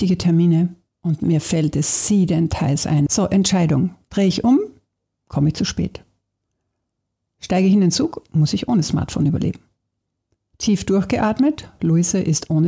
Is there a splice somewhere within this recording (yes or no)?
yes